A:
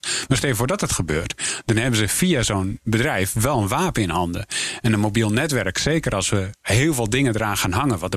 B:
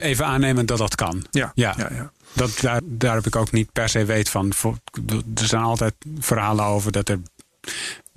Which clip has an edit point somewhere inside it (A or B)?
B